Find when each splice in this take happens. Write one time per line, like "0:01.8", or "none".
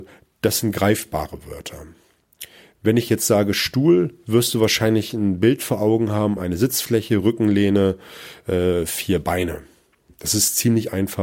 none